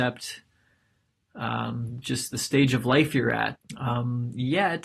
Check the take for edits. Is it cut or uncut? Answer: cut